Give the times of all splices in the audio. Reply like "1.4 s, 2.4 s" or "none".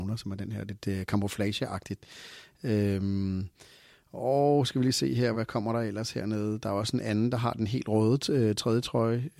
5.3 s